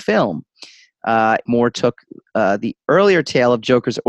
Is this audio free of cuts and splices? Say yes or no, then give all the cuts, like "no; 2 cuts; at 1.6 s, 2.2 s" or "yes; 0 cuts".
no; 1 cut; at 1.4 s